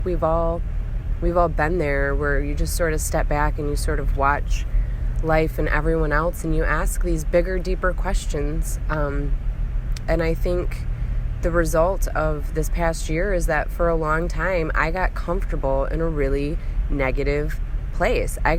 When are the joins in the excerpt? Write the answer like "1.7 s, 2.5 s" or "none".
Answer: 10.0 s

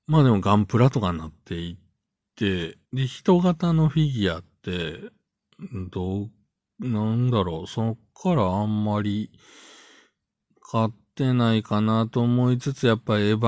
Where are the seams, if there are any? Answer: 2.8 s

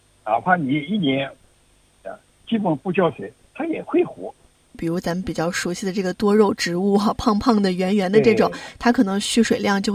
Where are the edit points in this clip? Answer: 4.7 s

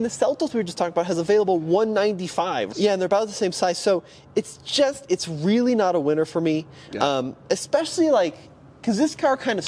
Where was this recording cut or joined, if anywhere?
2.7 s

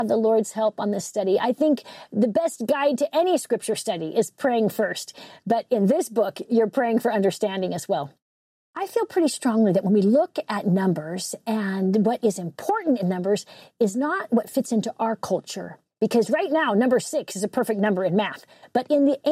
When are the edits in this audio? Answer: none

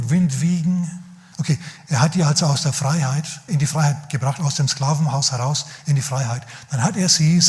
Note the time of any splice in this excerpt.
1.3 s, 3.5 s

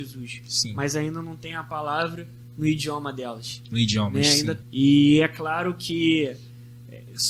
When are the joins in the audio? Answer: 4.6 s

